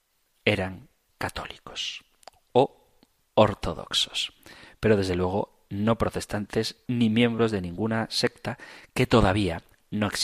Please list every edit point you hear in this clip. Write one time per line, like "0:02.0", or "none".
0:03.2
0:06.9

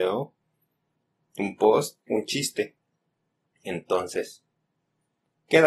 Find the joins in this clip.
0:02.1

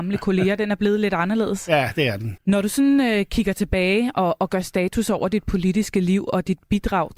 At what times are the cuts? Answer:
0:02.4

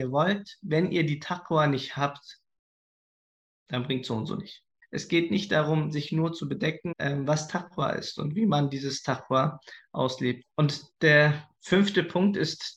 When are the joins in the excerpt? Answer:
0:04.8
0:06.9

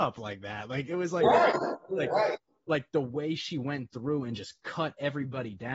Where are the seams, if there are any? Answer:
none

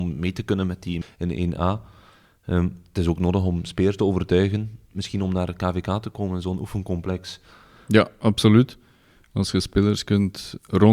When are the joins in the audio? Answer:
0:01.0

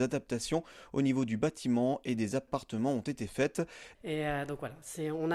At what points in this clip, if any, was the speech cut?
0:03.9

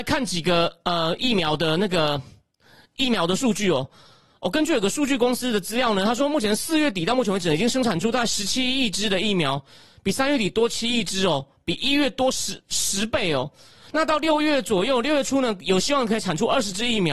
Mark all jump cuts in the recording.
none

